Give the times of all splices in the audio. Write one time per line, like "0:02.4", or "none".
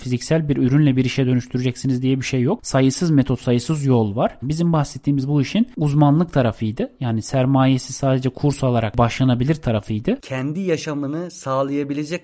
0:04.4
0:10.2